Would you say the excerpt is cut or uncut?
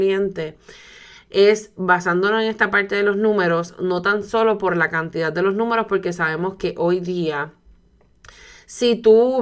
uncut